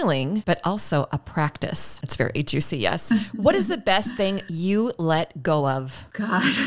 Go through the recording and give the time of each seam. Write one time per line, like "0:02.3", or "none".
0:02.0